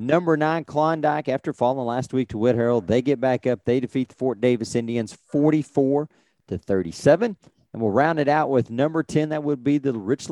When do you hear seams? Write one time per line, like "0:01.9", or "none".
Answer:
none